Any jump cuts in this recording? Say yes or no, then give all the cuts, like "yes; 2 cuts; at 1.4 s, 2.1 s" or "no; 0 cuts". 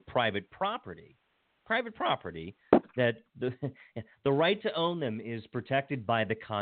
no; 0 cuts